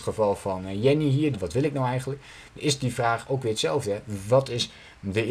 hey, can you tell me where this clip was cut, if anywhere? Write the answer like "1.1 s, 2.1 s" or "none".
1.3 s